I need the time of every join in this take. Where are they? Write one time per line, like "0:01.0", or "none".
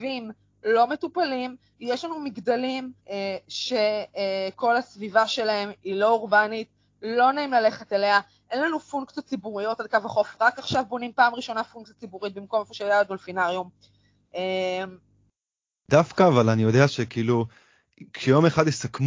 0:03.0